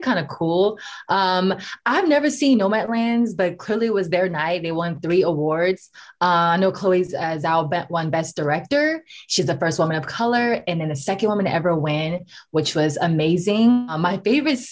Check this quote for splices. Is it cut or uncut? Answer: uncut